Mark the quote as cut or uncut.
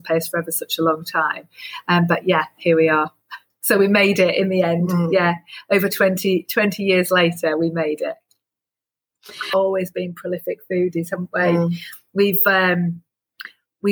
uncut